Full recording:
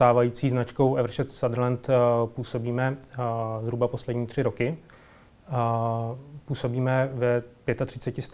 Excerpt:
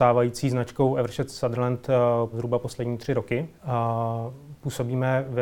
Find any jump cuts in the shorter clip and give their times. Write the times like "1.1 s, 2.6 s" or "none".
2.3 s, 3.6 s